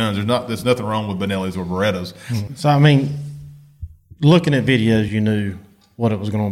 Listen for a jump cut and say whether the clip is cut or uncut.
cut